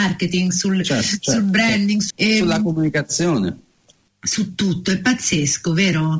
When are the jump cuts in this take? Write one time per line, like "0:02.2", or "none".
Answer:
0:02.1

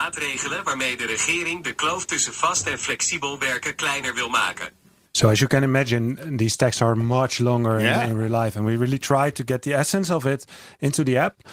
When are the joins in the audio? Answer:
0:05.1

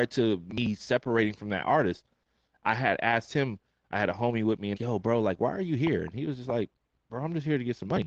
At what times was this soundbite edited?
0:04.7

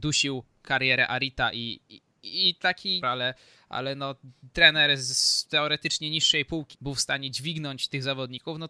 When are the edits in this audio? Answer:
0:03.0
0:06.7

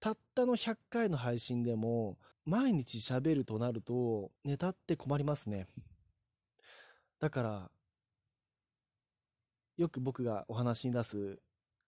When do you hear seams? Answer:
0:02.3
0:04.4

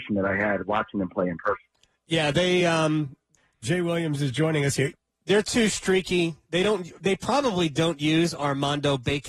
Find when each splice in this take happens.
none

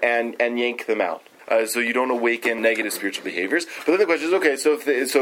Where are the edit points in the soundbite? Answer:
0:01.4
0:02.6

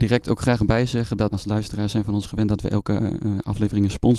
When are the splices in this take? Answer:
0:01.3

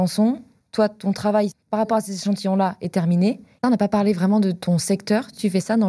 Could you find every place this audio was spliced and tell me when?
0:03.6

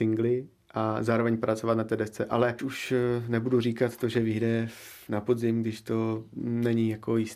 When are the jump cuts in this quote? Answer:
0:02.6

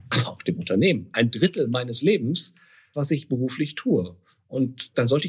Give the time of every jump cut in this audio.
0:02.9

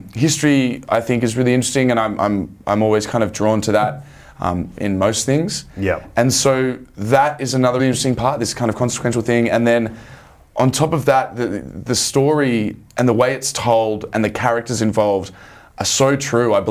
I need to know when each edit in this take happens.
0:07.8

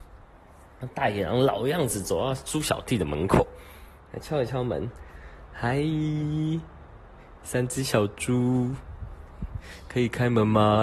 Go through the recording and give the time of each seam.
none

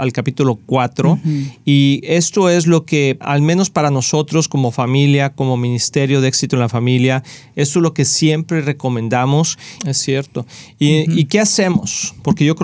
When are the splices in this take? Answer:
0:03.2
0:09.8

